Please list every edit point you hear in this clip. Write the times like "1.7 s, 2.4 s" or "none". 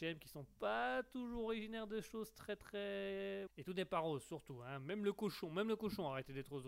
3.5 s